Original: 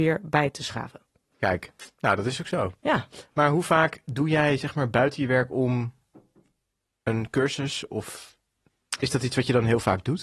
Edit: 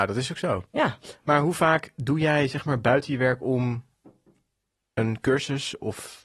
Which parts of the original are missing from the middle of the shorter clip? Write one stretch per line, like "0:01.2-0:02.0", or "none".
none

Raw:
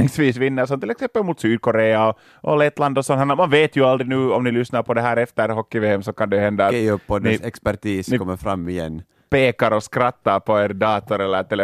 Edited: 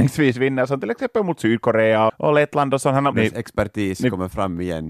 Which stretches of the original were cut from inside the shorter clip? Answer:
0:02.1-0:02.3
0:03.4-0:07.2

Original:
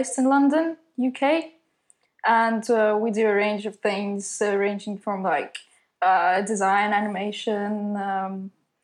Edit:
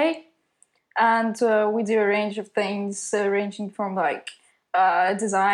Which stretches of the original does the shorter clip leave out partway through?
none

